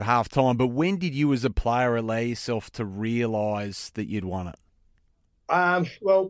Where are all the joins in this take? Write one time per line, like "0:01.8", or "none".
none

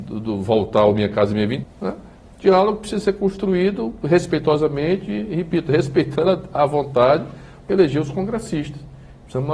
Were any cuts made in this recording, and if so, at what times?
0:01.6
0:07.6

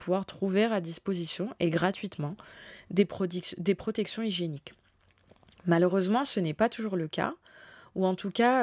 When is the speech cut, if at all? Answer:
none

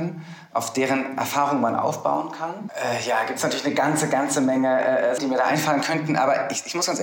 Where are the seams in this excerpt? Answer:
0:02.7
0:05.2

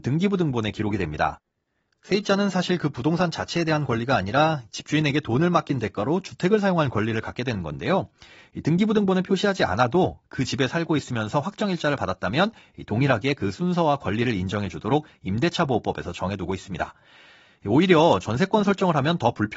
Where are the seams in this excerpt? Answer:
none

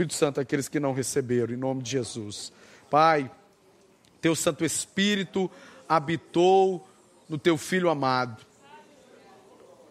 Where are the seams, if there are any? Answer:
none

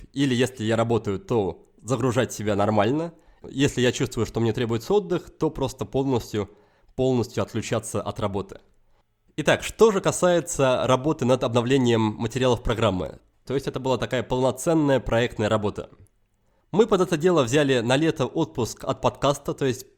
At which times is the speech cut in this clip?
0:13.4

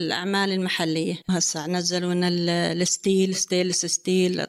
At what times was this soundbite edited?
none

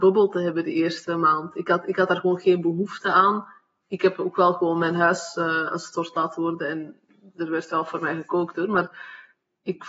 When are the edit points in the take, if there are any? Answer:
none

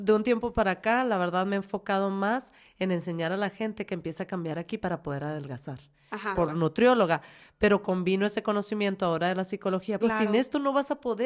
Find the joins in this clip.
0:06.4
0:10.0

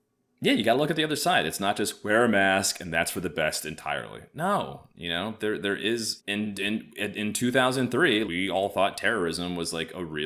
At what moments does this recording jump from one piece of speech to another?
0:06.2
0:08.2

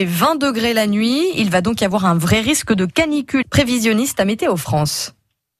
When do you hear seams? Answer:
0:03.4

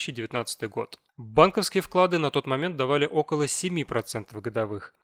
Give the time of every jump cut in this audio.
0:01.1

